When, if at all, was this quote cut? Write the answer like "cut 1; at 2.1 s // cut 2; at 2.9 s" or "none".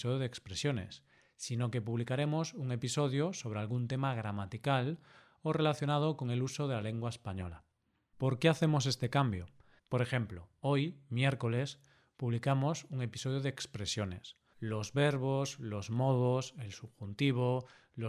cut 1; at 9.8 s // cut 2; at 14.5 s